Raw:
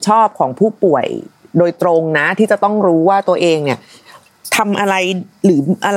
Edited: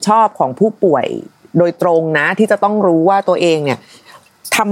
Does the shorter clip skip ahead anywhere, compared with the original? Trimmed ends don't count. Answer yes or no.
no